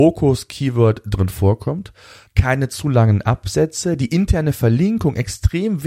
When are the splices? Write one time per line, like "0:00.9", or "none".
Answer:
0:02.3

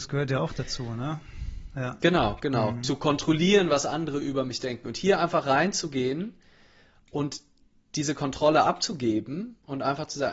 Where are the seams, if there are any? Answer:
none

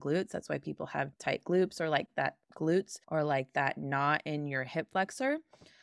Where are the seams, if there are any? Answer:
0:01.1
0:03.0

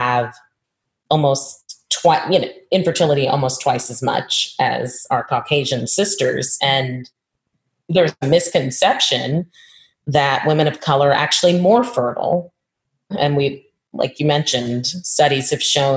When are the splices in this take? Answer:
0:06.6
0:13.1

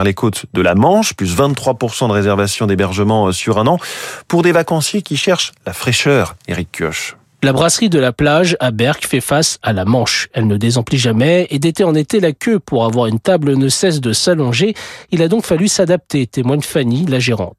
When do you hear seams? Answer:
none

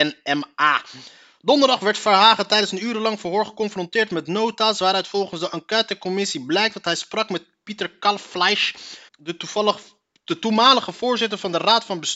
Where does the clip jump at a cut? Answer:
0:09.1

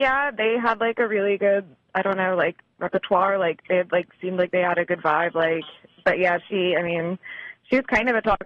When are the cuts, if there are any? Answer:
none

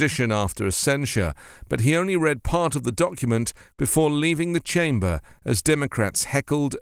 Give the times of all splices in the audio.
none

